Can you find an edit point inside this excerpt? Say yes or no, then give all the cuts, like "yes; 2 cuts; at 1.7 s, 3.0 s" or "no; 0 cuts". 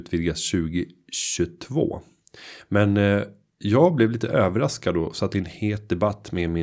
no; 0 cuts